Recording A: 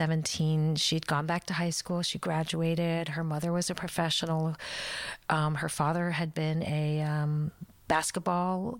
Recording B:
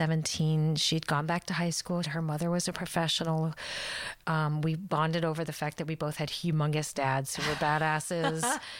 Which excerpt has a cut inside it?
B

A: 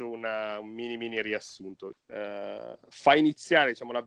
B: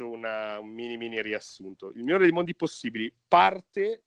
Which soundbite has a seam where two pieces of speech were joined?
A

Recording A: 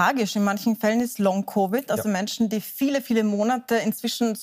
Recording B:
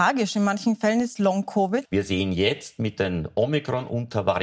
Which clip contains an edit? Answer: B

